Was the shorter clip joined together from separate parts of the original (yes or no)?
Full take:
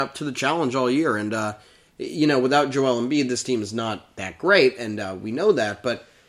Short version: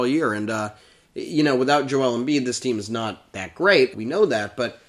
yes